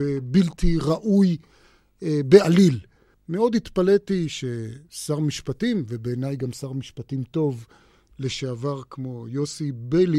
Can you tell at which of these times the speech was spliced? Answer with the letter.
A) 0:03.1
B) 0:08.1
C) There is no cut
A